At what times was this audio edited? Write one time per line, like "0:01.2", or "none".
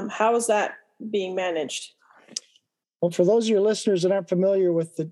none